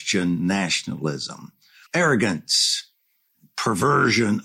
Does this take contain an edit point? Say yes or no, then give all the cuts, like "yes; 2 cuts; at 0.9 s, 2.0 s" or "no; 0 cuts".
yes; 1 cut; at 1.9 s